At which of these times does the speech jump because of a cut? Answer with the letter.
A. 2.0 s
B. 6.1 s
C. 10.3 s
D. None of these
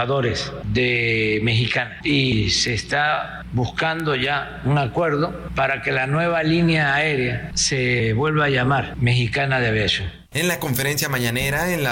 A